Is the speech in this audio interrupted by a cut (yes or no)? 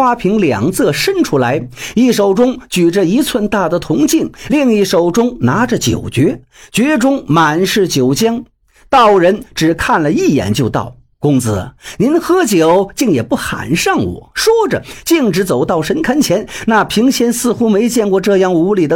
no